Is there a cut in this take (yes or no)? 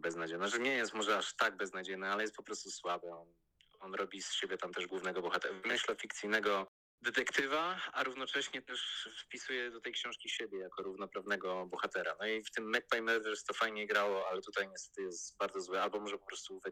no